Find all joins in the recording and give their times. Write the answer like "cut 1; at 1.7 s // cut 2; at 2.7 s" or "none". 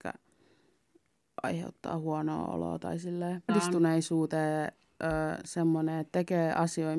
cut 1; at 3.5 s